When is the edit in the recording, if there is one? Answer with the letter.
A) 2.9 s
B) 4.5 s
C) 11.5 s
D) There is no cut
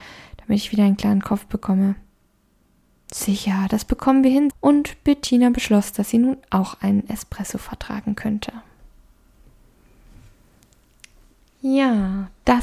B